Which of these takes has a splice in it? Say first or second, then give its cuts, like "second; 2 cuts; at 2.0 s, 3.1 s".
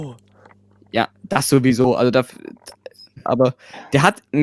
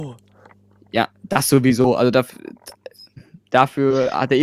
first; 1 cut; at 3.3 s